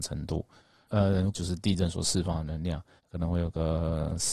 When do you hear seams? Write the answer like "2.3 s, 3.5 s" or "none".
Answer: 1.3 s, 3.0 s